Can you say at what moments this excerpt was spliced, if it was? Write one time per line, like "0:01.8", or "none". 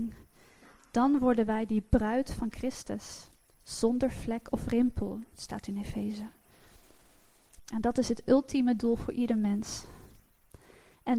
0:07.6